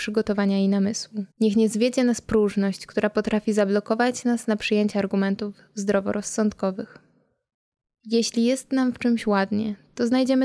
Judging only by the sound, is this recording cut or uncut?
cut